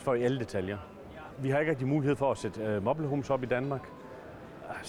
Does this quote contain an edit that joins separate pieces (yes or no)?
yes